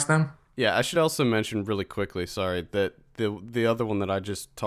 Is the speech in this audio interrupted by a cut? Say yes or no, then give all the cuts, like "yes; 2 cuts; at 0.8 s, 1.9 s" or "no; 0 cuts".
no; 0 cuts